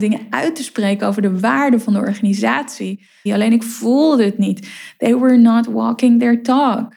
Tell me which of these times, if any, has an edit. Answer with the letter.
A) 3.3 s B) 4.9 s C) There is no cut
A